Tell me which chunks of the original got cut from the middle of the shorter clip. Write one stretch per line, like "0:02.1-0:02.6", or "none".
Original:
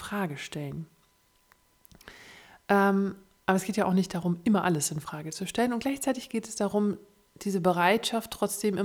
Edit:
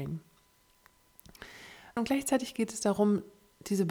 0:02.6-0:05.7